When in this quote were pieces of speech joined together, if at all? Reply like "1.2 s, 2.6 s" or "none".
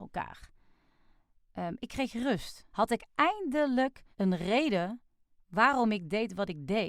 2.7 s, 4.1 s